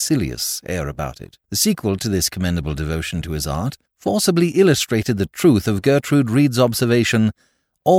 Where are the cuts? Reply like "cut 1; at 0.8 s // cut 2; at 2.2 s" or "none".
cut 1; at 1.4 s // cut 2; at 3.9 s

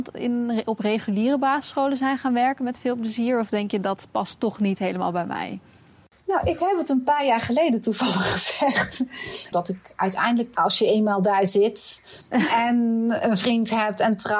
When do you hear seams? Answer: cut 1; at 9.5 s // cut 2; at 10.6 s

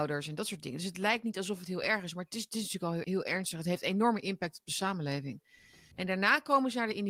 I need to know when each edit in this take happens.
cut 1; at 3.0 s // cut 2; at 5.9 s

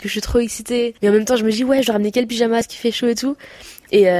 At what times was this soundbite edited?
cut 1; at 1.0 s // cut 2; at 2.6 s

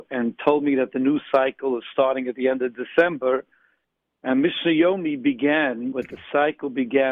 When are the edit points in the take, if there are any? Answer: cut 1; at 5.9 s

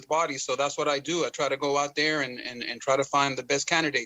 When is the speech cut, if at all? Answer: none

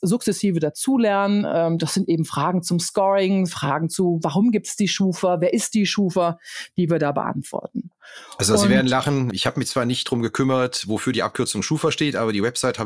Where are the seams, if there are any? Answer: none

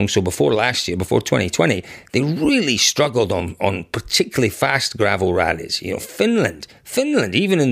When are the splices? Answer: none

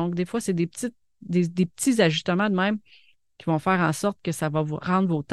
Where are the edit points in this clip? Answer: none

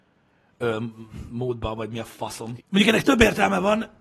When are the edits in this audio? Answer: cut 1; at 2.6 s

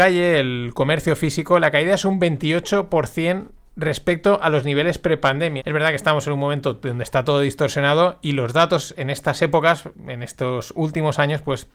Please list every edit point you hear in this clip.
cut 1; at 5.6 s

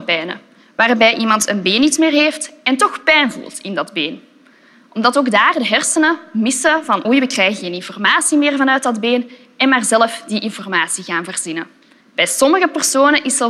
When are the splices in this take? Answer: cut 1; at 7.0 s // cut 2; at 12.0 s

